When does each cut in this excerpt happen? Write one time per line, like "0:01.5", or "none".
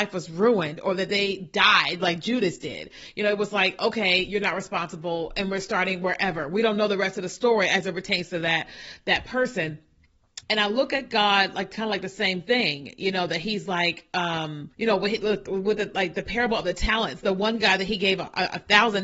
0:10.4
0:14.7